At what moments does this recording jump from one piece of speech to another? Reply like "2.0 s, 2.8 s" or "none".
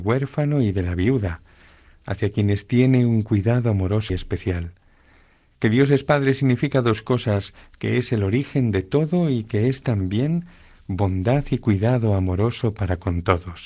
4.1 s